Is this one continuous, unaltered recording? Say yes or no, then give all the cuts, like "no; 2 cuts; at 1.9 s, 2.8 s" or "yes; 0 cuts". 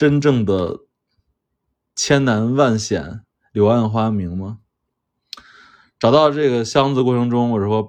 yes; 0 cuts